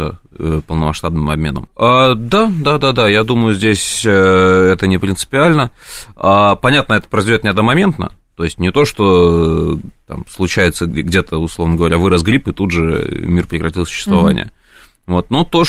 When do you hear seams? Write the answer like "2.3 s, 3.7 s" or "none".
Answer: 1.7 s